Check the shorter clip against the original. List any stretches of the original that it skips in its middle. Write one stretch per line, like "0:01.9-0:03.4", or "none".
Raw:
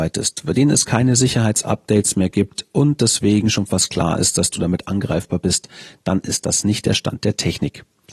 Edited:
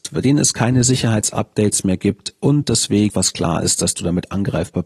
0:03.4-0:03.7